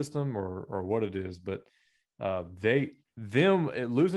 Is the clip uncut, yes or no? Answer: yes